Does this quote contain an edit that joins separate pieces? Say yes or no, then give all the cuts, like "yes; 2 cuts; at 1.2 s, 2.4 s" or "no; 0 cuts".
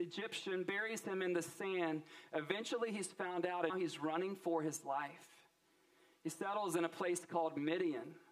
yes; 1 cut; at 3.7 s